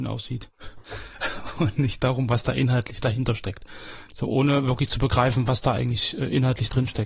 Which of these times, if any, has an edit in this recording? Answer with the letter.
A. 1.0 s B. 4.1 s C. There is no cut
B